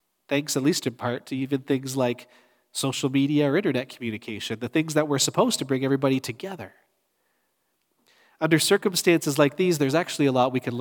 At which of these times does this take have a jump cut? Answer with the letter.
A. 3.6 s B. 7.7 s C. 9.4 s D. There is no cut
D